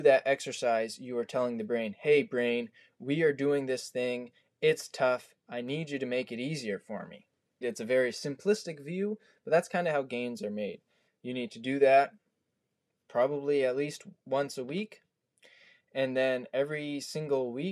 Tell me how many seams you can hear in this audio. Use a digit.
2